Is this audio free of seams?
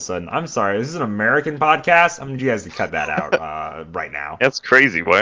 yes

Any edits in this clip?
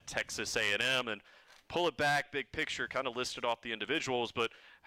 no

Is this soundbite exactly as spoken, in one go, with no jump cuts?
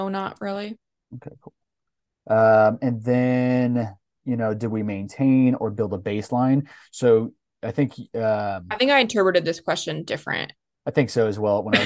yes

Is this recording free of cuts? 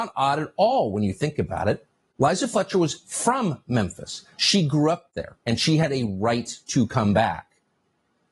yes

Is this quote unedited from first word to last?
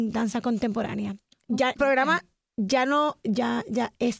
no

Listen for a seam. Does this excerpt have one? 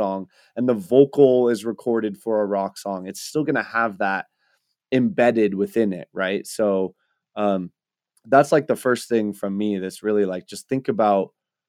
no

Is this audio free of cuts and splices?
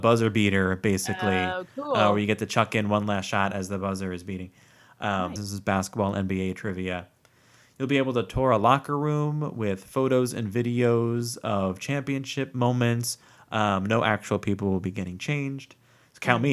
no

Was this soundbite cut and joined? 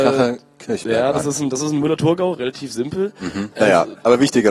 yes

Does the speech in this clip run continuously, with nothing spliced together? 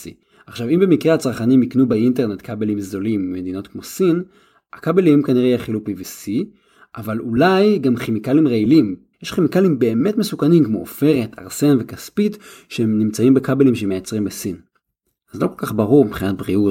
no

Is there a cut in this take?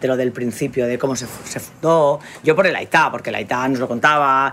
no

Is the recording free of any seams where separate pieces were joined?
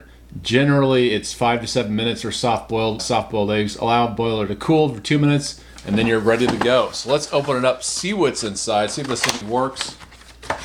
no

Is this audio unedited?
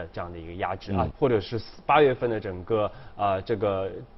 no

